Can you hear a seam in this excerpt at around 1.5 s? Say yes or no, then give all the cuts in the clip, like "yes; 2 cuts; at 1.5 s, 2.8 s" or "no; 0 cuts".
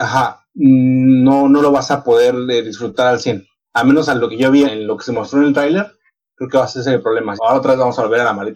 no; 2 cuts; at 4.6 s, 7.4 s